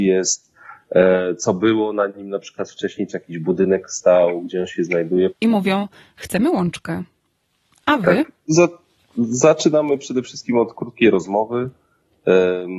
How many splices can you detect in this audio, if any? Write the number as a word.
one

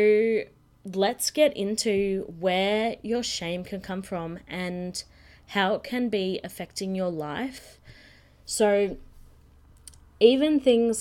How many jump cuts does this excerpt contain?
zero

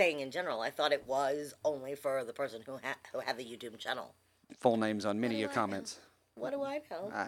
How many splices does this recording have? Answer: one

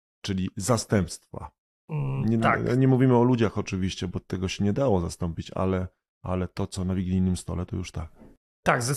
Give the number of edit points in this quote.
zero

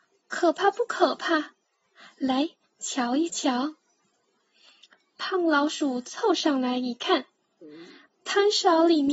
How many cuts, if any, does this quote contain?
one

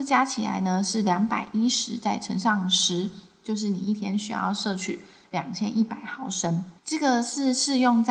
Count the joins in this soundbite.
one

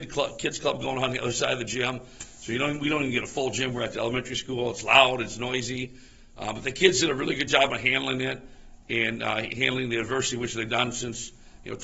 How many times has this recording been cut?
zero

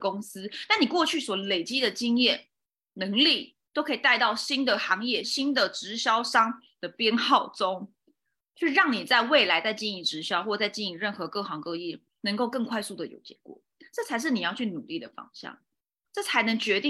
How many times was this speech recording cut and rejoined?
one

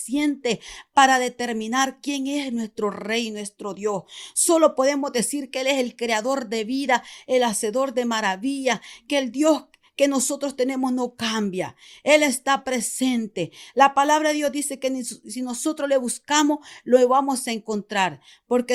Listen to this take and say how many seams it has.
zero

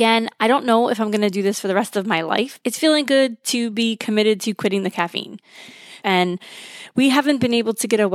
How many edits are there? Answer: two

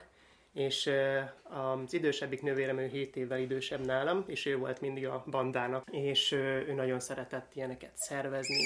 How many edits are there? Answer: one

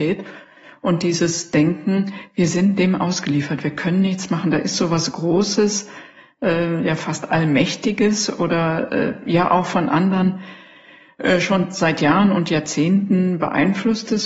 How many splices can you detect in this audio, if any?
zero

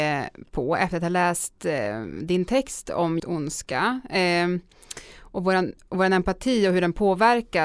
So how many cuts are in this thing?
one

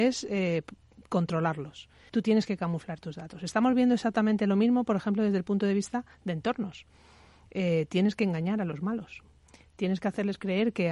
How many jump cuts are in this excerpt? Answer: one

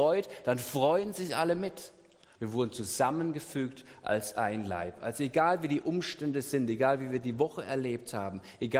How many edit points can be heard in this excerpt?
one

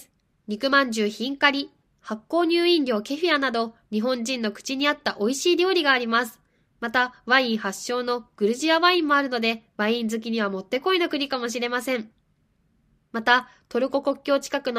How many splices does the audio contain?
one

